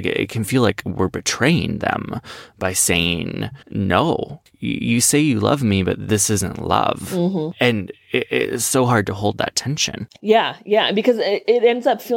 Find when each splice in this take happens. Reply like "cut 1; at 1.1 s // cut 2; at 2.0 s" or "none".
cut 1; at 3.6 s